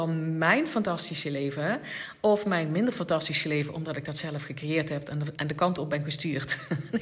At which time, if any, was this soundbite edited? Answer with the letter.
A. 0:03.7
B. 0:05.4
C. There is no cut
B